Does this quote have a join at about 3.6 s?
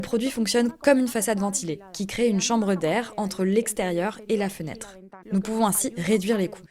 no; 1 cut; at 5.2 s

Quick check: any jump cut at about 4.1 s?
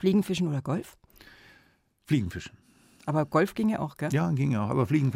no; 0 cuts

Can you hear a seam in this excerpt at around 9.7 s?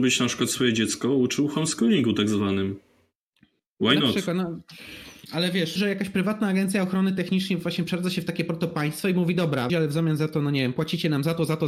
yes; 2 cuts; at 5.8 s, 9.7 s

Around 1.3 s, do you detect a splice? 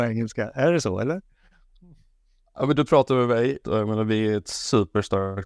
no; 1 cut; at 3.6 s

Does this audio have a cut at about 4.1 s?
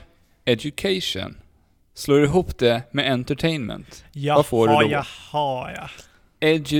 no; 0 cuts

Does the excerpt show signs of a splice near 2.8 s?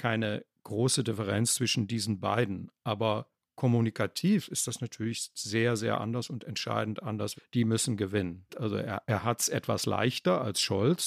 no; 2 cuts; at 7.4 s, 8.5 s

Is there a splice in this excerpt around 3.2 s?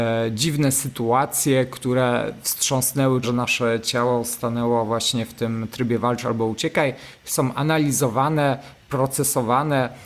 yes; 1 cut; at 3.2 s

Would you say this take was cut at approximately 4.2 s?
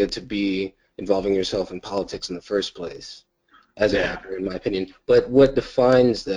no; 0 cuts

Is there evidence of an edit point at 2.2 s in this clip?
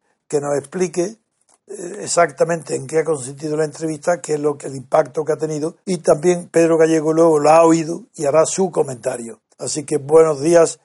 no; 3 cuts; at 4.6 s, 5.8 s, 9.5 s

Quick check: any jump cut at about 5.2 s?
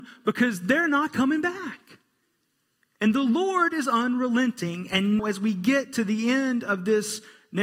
yes; 1 cut; at 5.2 s

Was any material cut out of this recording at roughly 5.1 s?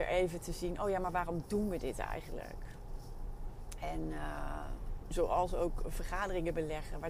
yes; 1 cut; at 5.1 s

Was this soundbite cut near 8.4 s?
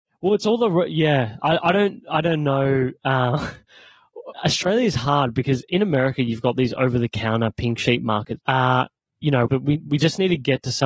yes; 3 cuts; at 4.3 s, 8.4 s, 9.5 s

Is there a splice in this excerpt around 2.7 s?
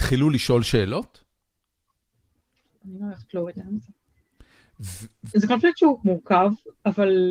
yes; 2 cuts; at 2.7 s, 5.3 s

